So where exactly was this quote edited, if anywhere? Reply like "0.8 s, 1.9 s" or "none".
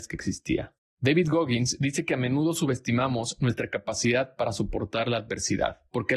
none